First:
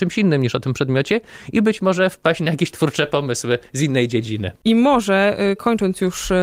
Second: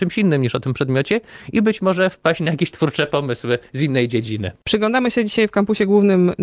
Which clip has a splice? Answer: first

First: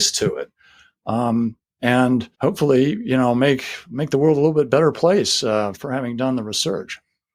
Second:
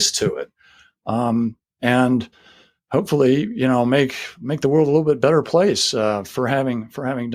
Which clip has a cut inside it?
first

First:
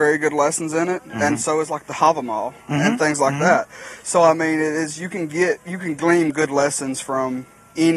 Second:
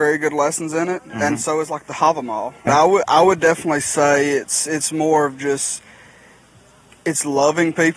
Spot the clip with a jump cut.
second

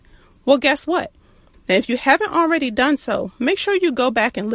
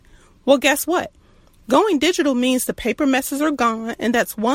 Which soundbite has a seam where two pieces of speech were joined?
first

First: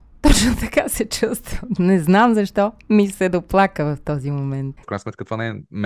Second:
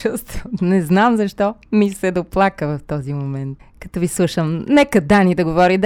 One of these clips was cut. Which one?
first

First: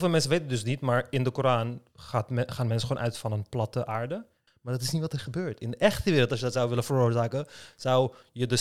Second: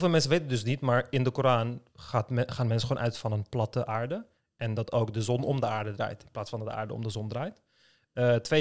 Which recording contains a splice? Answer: first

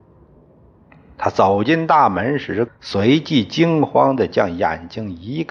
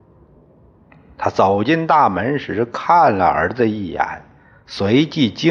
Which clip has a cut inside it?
first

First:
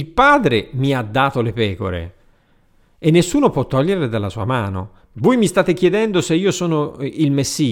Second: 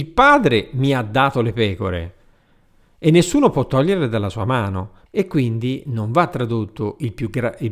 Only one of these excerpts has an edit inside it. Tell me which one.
second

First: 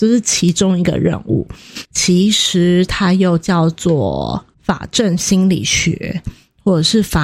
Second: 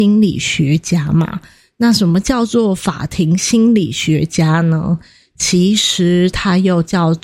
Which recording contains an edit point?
first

